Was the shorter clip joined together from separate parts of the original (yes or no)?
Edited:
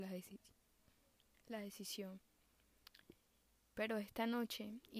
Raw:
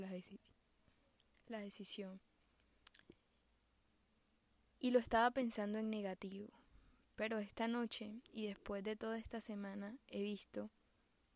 yes